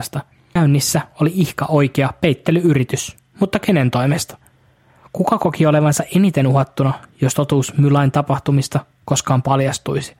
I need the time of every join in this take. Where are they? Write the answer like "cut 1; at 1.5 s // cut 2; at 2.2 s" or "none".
none